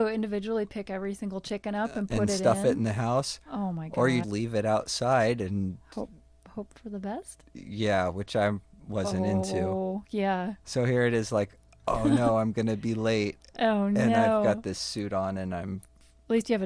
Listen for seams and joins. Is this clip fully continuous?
no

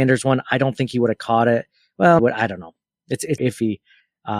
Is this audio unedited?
no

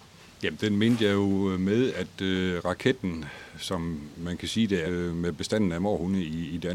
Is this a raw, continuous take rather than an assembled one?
no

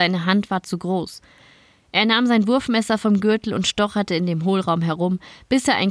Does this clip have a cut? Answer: no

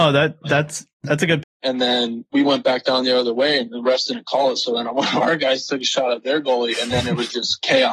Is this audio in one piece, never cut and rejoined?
no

